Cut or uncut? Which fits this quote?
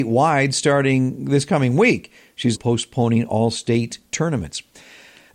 cut